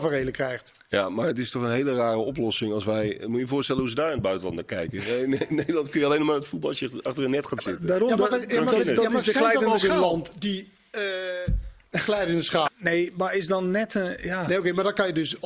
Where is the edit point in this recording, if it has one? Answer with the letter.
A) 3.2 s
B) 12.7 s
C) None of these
B